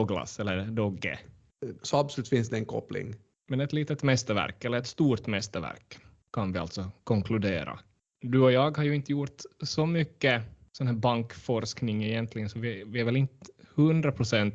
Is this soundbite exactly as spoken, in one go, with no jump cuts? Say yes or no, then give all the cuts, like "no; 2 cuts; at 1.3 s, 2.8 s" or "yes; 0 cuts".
no; 1 cut; at 1.8 s